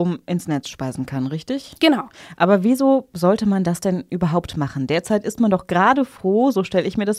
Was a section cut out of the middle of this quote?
no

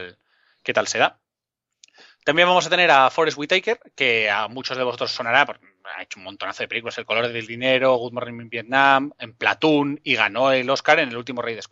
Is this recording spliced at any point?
no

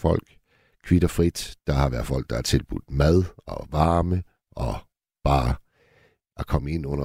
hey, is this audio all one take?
yes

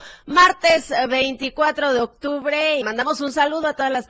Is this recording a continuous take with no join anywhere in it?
no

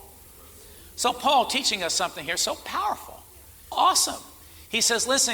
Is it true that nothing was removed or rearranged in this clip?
no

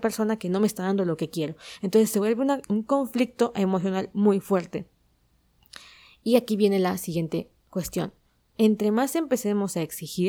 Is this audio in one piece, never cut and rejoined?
no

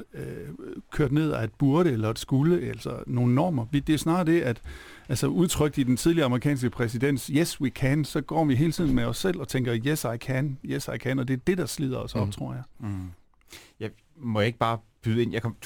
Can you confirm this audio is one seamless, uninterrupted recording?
yes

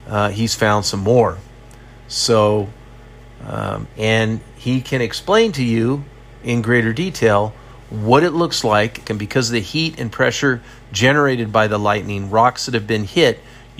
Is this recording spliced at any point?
yes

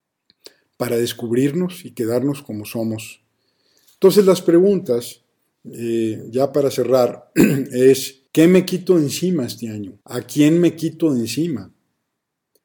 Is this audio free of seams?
no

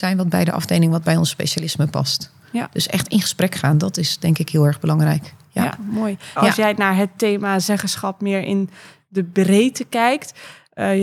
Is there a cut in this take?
yes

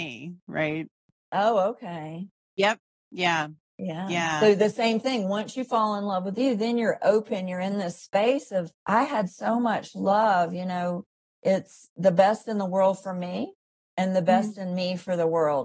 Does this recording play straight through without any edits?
no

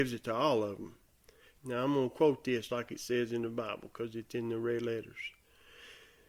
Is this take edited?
yes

